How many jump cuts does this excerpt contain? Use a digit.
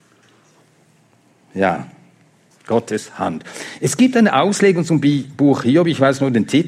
1